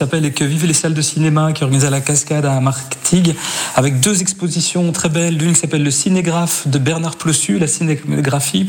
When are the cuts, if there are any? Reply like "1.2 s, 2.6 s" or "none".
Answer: 4.9 s